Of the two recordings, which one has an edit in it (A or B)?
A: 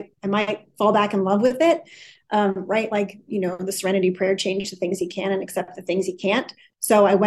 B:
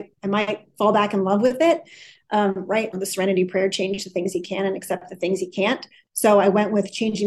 B